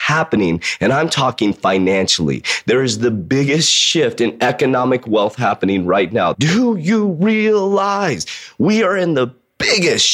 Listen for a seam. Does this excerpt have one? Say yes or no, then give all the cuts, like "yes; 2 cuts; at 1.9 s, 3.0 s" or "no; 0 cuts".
yes; 1 cut; at 6.3 s